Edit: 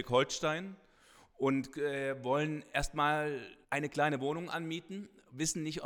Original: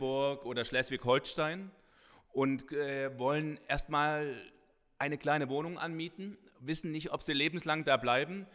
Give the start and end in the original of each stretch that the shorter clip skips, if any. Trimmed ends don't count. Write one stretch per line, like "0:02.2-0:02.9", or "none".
0:04.6-0:04.9

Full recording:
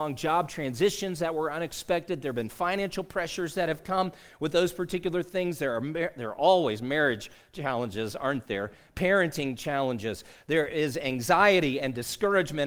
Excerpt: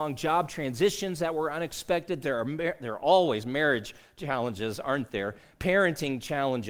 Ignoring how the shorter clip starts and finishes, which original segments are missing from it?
0:02.2-0:05.6

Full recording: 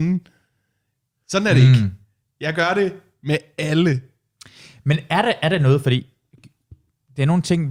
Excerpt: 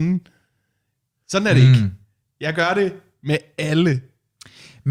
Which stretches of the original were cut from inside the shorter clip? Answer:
none

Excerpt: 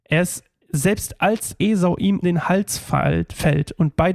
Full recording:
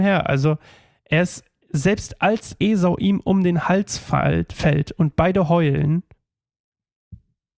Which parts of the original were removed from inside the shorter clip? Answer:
0:03.2-0:03.4

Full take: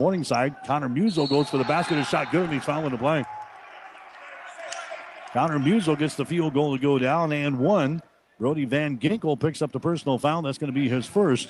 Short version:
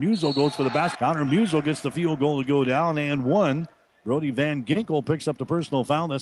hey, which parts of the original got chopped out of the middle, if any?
0:01.9-0:05.3

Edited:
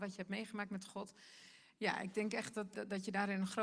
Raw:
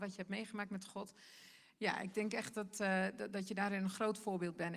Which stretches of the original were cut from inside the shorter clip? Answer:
0:02.7-0:03.2

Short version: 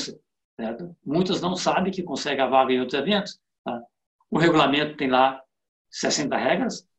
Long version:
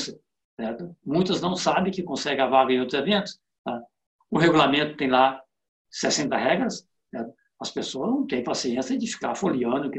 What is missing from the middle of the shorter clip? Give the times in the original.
none

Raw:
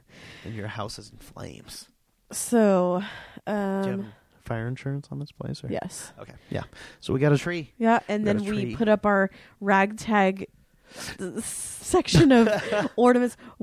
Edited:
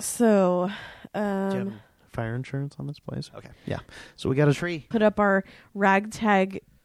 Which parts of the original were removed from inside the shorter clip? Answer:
0:05.6-0:06.1
0:07.7-0:08.8

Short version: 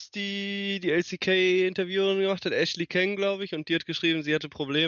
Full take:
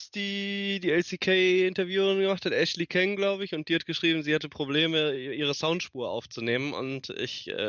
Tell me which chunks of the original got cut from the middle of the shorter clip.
none

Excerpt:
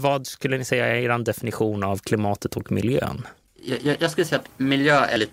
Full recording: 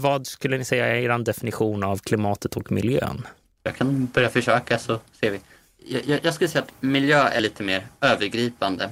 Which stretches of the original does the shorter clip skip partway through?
0:03.5-0:05.7

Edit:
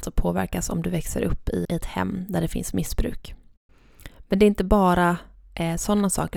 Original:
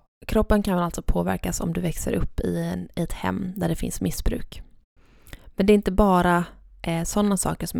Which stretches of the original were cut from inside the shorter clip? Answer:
0:02.6-0:02.9

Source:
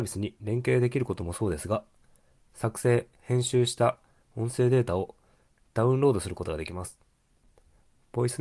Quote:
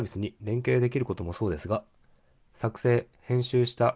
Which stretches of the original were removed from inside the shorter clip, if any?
none

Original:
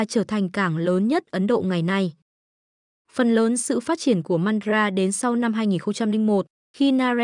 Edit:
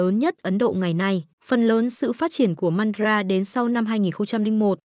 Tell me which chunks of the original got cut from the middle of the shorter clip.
0:02.2-0:03.0

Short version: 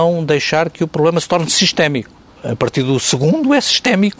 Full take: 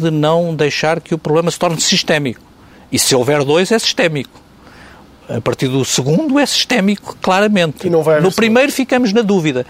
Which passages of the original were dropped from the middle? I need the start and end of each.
0:02.6-0:05.1

